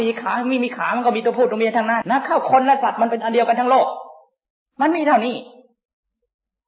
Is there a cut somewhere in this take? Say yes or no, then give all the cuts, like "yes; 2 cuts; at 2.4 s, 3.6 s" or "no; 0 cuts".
yes; 1 cut; at 2.0 s